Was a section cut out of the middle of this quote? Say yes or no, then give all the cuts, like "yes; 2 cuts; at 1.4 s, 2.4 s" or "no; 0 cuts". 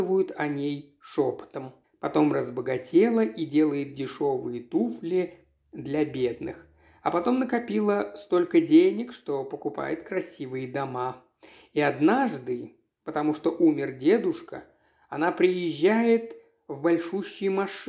yes; 1 cut; at 1.8 s